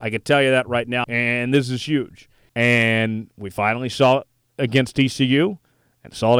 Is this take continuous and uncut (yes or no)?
no